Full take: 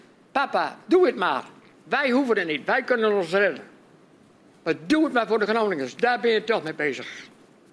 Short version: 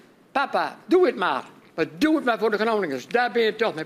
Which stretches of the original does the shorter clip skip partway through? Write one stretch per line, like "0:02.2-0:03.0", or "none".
0:01.7-0:04.6